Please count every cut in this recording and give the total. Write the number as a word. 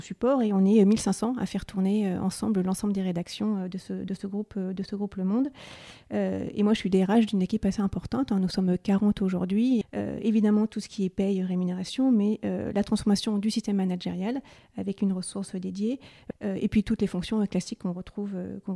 two